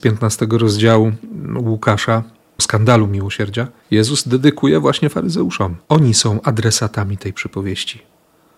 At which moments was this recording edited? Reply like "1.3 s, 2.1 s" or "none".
2.6 s, 3.8 s, 5.8 s